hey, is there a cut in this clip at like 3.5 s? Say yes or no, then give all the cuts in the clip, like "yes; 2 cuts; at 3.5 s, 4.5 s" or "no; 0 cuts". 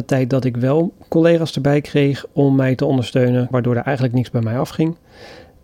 yes; 1 cut; at 3.5 s